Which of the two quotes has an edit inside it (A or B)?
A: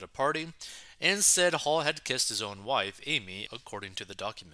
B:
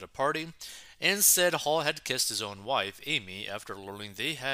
A